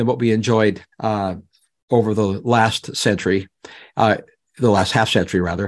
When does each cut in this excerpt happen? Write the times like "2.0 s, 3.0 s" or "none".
0.9 s